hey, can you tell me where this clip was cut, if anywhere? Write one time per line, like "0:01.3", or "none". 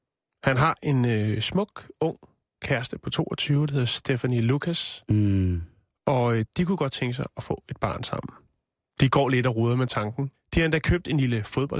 0:10.3